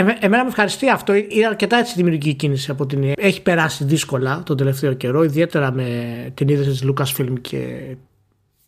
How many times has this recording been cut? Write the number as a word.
two